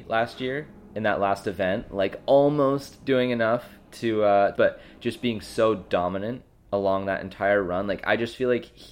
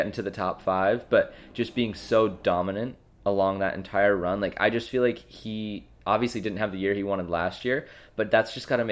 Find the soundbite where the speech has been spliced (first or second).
first